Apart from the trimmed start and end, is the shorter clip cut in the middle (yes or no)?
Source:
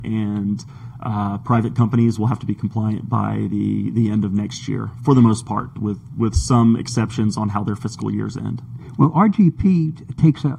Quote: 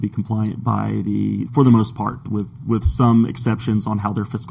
yes